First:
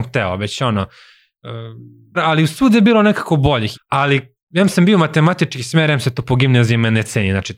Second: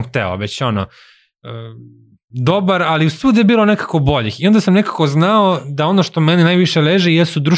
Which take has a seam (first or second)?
first